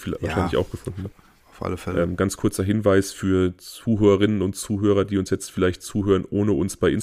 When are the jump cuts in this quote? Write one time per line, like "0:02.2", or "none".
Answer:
none